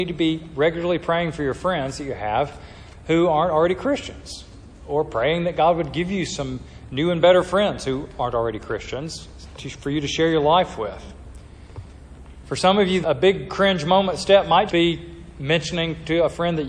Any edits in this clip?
yes; 2 cuts; at 13.0 s, 14.7 s

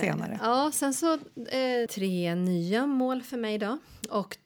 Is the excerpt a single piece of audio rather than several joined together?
no; 1 cut; at 1.9 s

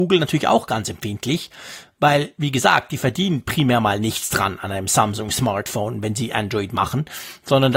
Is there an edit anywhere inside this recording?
no; 0 cuts

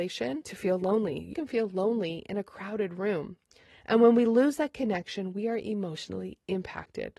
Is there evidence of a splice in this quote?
yes; 2 cuts; at 1.3 s, 3.7 s

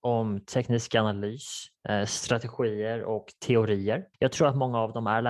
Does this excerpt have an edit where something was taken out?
yes; 1 cut; at 4.1 s

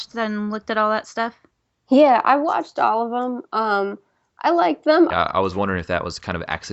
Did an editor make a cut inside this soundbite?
yes; 1 cut; at 5.1 s

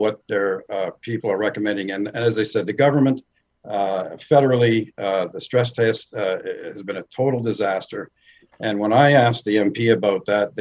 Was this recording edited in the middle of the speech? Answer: no; 0 cuts

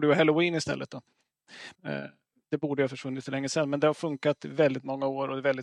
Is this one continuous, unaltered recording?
no; 1 cut; at 1.7 s

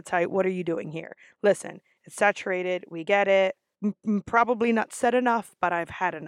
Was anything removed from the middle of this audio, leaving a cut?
yes; 2 cuts; at 2.0 s, 3.7 s

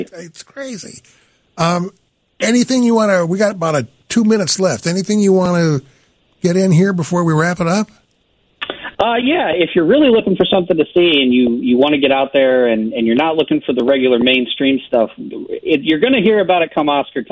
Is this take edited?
no; 0 cuts

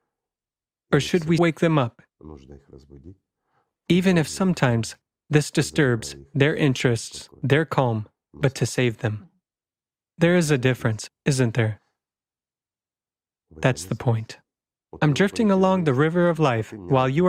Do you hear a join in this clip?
yes; 2 cuts; at 1.4 s, 15.0 s

